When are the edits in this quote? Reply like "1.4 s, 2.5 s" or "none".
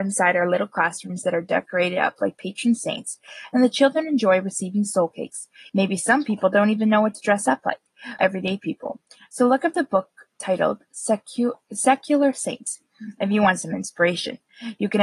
5.7 s, 8.2 s